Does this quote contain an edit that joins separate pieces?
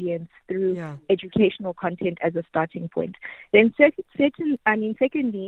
no; 0 cuts

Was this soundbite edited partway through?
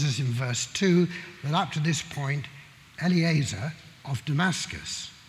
yes; 1 cut; at 3.0 s

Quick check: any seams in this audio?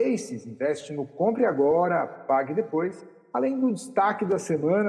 yes; 1 cut; at 3.3 s

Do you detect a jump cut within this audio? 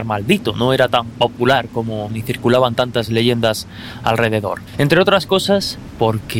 yes; 2 cuts; at 2.1 s, 4.7 s

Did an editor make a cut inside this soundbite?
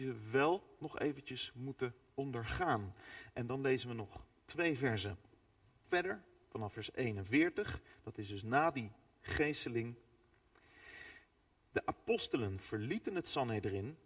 yes; 1 cut; at 5.8 s

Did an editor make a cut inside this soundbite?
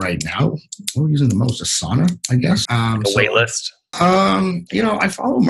yes; 2 cuts; at 2.7 s, 3.9 s

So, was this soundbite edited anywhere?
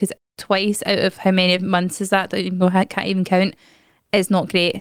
no; 0 cuts

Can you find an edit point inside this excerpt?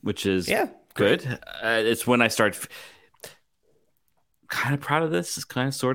no; 0 cuts

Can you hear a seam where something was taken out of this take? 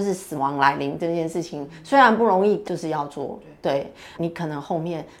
yes; 2 cuts; at 2.6 s, 4.1 s

